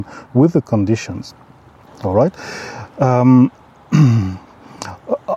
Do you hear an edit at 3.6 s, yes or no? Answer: yes